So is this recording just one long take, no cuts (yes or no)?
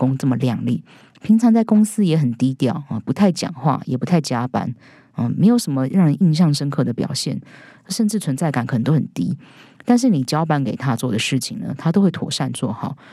yes